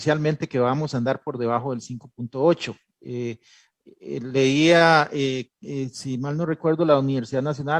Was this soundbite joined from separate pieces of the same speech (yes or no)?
no